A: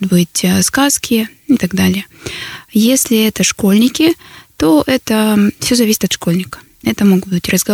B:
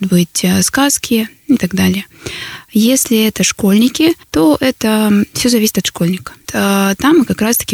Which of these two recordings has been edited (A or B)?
B